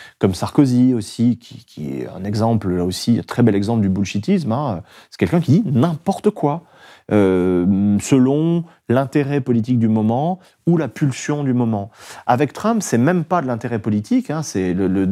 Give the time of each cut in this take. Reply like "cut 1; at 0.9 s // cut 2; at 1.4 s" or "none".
none

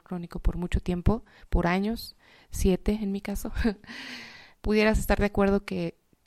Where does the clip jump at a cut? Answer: cut 1; at 4.5 s

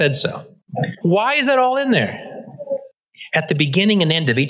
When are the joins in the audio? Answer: cut 1; at 1.0 s // cut 2; at 3.3 s

